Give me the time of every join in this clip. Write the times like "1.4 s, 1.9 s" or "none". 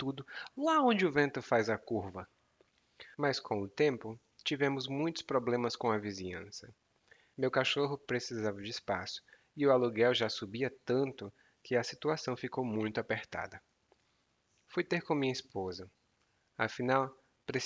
3.1 s, 7.3 s